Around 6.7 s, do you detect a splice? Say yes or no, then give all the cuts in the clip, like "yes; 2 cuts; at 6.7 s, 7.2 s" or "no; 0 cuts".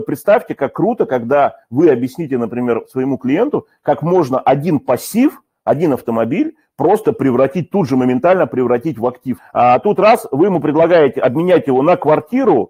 no; 1 cut; at 9.4 s